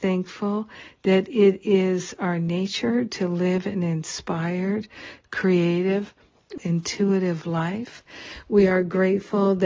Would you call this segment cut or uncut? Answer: cut